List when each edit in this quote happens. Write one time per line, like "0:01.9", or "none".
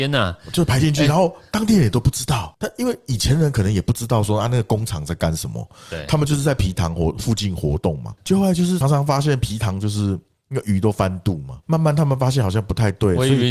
0:08.8